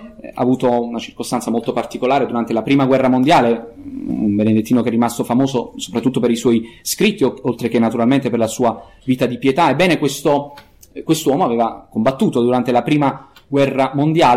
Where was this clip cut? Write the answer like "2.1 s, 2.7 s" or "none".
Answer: none